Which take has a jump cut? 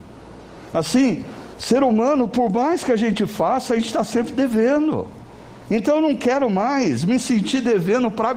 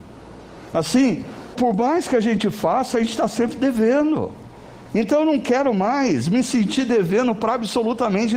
second; 1 cut; at 1.5 s

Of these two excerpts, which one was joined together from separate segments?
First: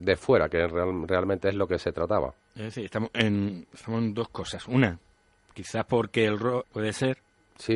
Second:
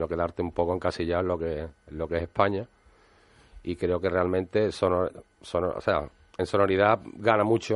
first; 1 cut; at 6.6 s

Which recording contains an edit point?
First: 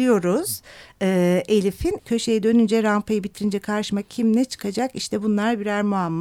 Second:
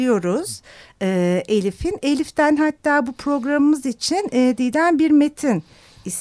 first; 1 cut; at 2.0 s

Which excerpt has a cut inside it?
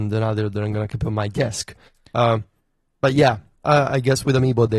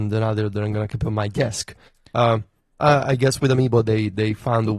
second; 1 cut; at 2.7 s

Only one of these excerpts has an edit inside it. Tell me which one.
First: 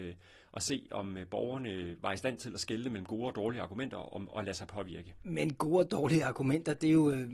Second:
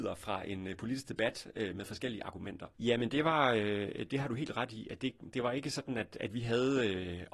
second; 2 cuts; at 2.7 s, 4.1 s

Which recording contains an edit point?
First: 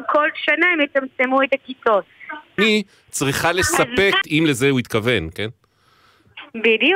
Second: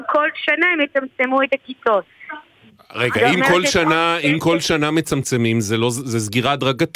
first; 2 cuts; at 2.6 s, 4.2 s

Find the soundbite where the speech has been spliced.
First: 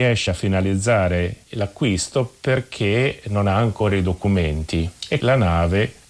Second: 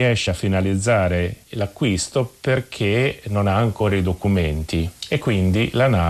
first; 1 cut; at 5.2 s

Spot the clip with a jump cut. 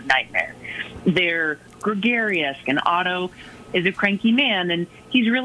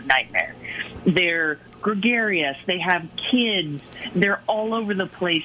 first; 1 cut; at 2.6 s

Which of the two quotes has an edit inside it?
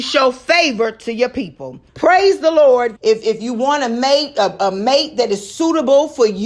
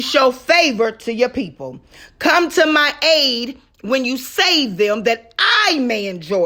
first; 2 cuts; at 1.9 s, 3.0 s

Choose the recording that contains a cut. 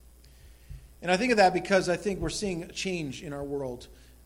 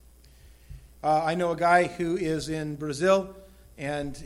second; 1 cut; at 0.9 s

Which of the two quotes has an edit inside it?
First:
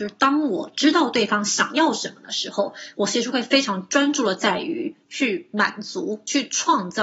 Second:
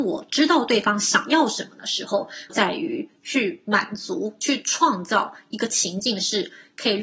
second; 1 cut; at 2.5 s

